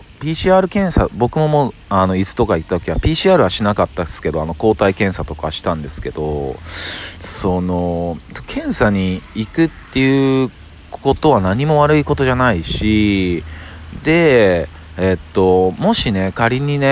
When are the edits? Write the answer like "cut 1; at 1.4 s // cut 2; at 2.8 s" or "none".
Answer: none